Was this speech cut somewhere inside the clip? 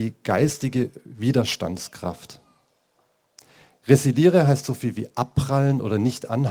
no; 0 cuts

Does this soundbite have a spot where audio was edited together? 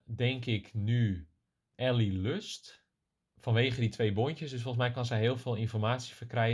no; 0 cuts

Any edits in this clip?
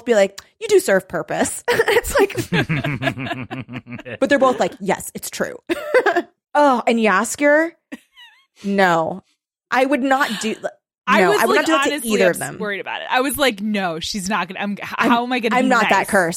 yes; 2 cuts; at 4.2 s, 6.4 s

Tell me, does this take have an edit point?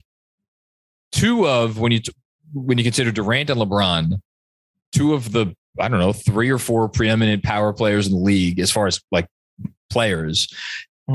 no; 0 cuts

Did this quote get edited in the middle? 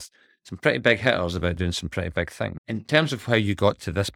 yes; 1 cut; at 2.6 s

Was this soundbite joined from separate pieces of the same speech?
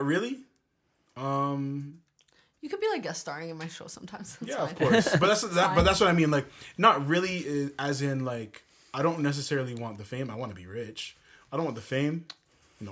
no; 0 cuts

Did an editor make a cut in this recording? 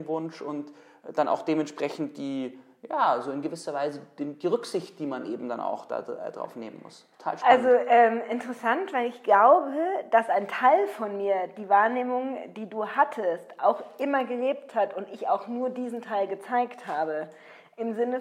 yes; 1 cut; at 7.1 s

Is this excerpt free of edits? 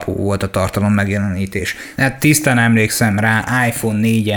no; 1 cut; at 2.0 s

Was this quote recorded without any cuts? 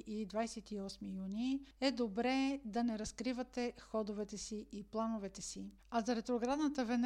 no; 1 cut; at 5.8 s

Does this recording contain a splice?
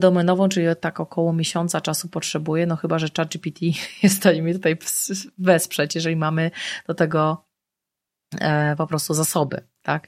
no; 0 cuts

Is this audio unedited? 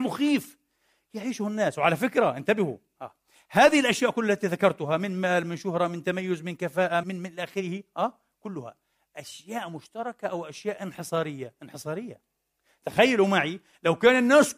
no; 1 cut; at 7.0 s

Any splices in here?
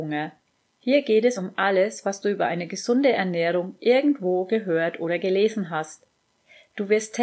no; 0 cuts

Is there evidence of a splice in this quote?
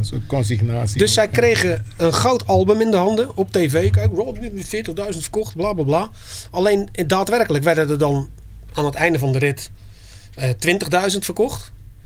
no; 0 cuts

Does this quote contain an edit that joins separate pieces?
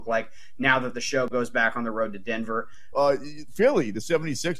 yes; 1 cut; at 2.9 s

